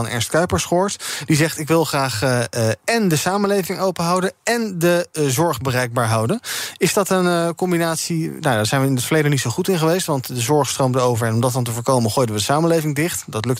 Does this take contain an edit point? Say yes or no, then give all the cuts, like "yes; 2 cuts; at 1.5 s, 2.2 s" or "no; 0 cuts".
no; 0 cuts